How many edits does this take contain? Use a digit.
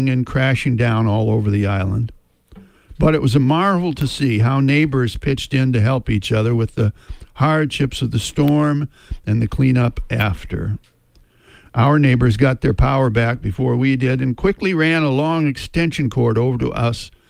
0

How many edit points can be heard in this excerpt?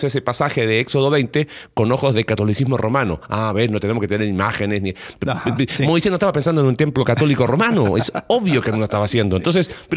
0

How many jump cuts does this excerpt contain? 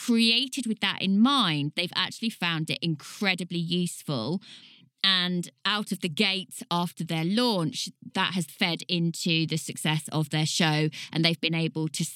1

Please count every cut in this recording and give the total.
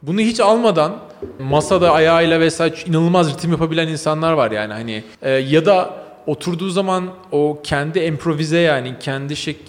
2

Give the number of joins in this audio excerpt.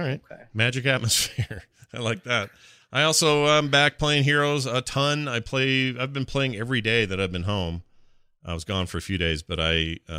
0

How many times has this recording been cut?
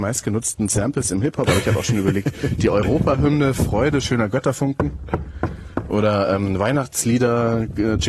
0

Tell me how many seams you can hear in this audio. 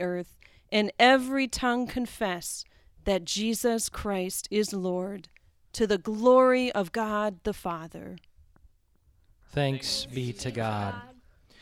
1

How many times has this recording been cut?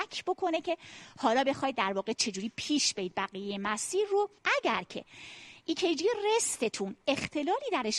1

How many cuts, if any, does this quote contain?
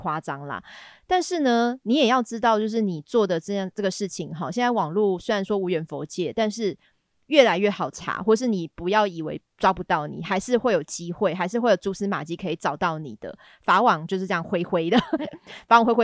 0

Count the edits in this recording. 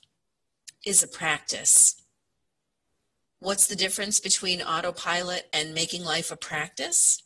0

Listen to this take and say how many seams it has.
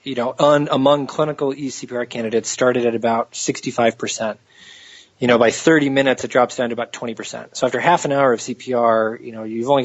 0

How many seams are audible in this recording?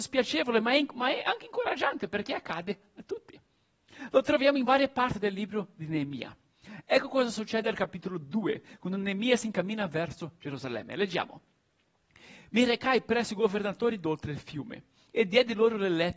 0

